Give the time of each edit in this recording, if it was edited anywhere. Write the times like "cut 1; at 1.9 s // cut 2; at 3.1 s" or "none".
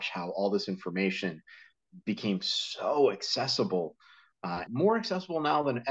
cut 1; at 4.7 s